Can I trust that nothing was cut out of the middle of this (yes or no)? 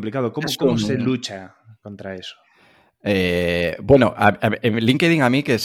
yes